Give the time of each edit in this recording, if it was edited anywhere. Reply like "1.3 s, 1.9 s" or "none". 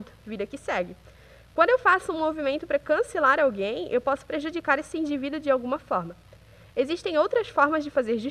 none